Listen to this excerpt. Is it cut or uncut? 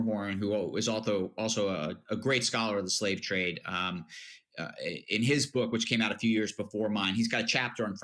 uncut